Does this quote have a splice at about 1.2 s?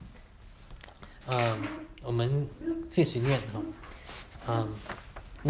yes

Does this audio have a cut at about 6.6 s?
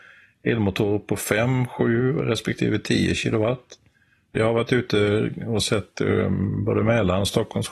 no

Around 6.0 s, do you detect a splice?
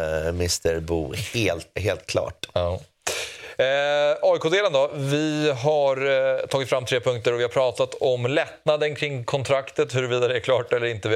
no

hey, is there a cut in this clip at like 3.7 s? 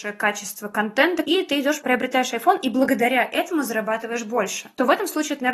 no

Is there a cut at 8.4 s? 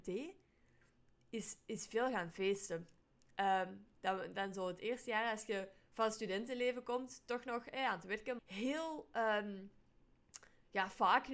yes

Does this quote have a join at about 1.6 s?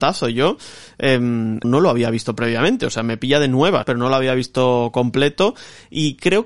yes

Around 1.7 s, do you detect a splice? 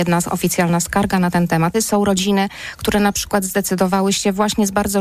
yes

